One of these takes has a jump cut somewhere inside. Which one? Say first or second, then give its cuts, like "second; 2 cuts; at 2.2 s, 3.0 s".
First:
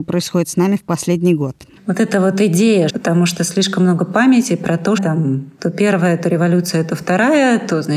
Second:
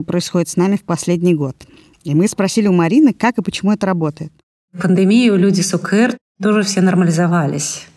first; 3 cuts; at 1.8 s, 2.9 s, 5.0 s